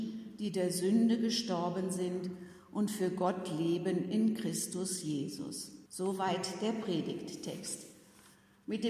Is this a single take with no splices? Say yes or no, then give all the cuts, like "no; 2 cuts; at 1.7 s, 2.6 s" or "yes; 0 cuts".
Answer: no; 1 cut; at 5.9 s